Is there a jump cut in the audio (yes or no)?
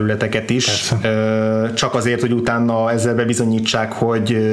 no